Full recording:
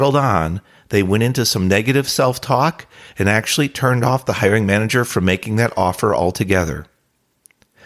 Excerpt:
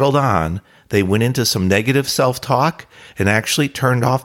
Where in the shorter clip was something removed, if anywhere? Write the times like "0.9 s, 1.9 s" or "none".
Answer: none